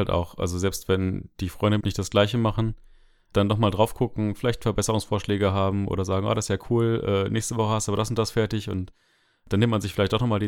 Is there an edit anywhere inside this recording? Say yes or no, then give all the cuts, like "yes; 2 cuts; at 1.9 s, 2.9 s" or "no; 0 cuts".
yes; 1 cut; at 1.8 s